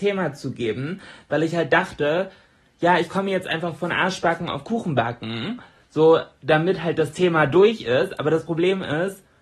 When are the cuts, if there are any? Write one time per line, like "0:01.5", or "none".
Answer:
none